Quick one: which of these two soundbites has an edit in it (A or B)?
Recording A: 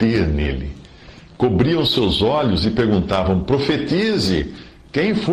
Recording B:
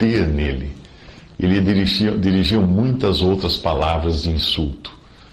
B